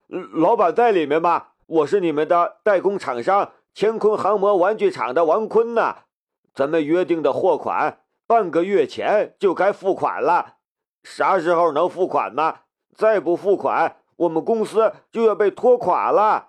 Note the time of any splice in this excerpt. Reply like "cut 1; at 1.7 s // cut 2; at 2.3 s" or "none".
cut 1; at 1.6 s